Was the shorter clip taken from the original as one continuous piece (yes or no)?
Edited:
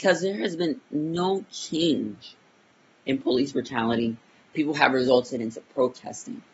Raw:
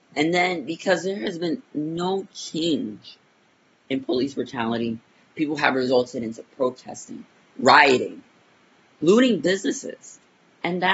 yes